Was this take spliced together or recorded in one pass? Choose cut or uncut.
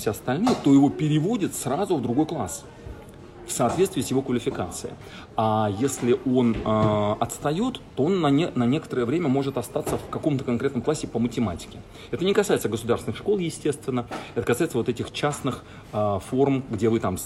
uncut